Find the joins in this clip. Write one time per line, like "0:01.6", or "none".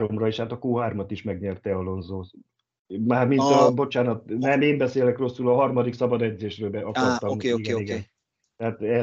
none